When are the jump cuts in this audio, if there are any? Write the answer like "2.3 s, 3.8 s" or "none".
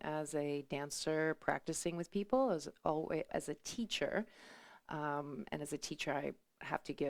3.3 s

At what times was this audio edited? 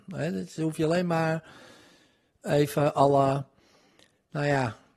none

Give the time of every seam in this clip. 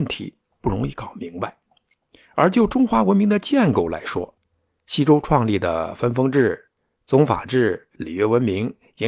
7.9 s

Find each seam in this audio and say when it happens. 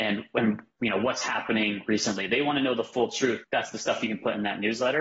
3.4 s

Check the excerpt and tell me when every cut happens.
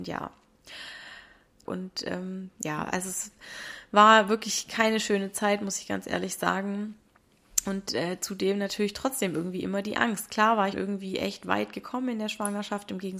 1.6 s, 10.7 s

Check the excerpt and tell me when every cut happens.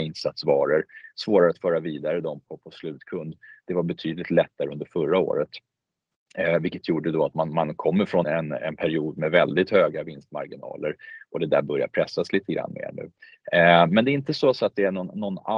8.2 s

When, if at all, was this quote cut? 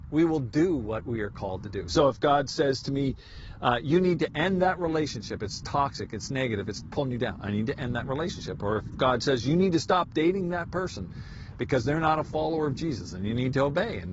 none

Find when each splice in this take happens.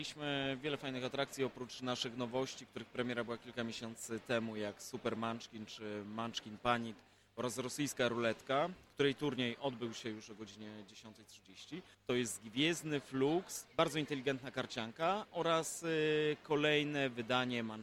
11.9 s, 13.7 s

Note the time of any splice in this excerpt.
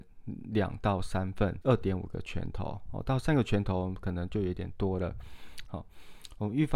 1.6 s, 5.7 s

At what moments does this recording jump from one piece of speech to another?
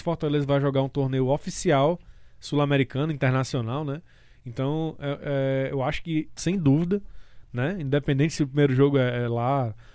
6.4 s

